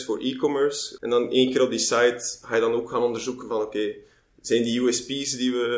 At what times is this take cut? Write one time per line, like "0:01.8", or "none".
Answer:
0:01.0